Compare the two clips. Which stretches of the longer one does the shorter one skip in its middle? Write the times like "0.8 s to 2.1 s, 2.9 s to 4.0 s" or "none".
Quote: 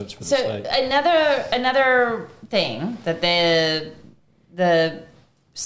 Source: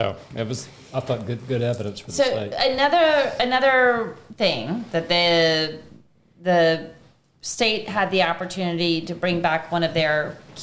none